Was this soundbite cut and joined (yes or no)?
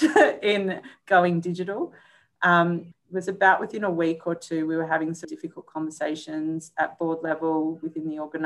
yes